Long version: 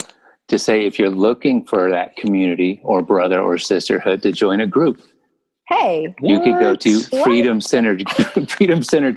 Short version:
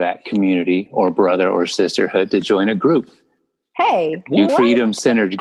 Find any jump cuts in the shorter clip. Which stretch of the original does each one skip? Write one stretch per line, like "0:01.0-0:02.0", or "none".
0:06.4-0:07.2

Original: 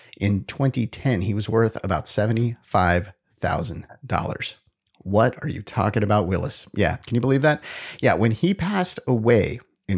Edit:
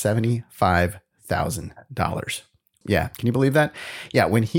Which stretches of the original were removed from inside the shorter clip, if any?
0:04.9-0:06.7

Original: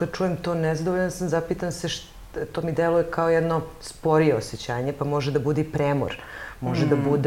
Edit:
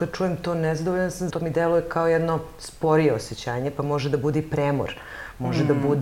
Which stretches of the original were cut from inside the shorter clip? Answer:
0:01.3-0:02.5

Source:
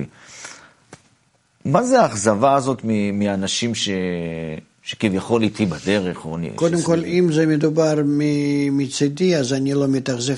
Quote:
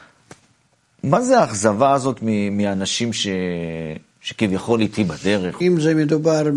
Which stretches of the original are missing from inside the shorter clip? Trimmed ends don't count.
0:06.2-0:07.1

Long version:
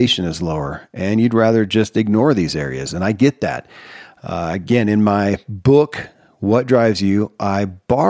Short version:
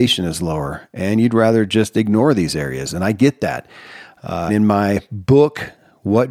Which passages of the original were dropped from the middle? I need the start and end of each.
0:04.5-0:04.8

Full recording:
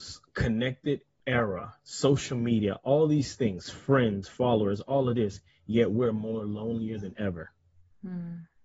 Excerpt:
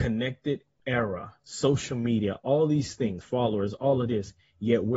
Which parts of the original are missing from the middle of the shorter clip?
0:03.6-0:04.3

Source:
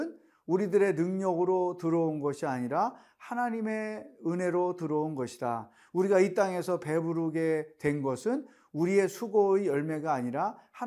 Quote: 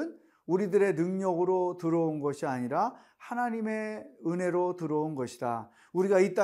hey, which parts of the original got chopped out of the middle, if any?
none

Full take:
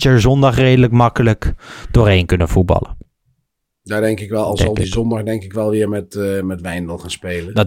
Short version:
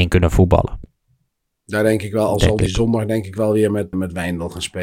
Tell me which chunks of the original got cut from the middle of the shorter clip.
0:06.1-0:06.4

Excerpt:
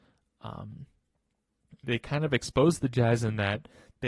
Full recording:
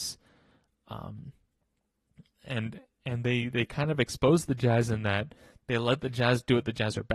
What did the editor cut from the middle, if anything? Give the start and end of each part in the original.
0:02.3-0:03.5

